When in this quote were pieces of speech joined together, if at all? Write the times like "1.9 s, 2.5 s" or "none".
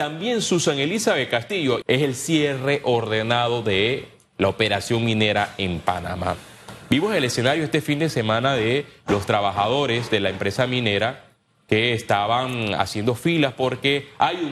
1.8 s